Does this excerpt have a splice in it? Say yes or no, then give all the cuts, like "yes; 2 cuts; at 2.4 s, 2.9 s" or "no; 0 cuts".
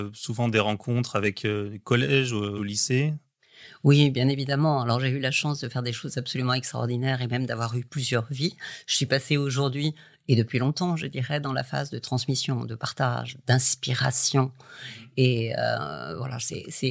no; 0 cuts